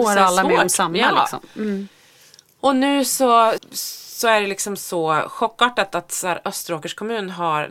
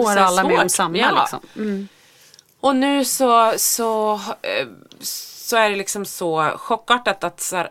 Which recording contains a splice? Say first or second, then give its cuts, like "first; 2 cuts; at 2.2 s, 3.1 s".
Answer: first; 1 cut; at 3.6 s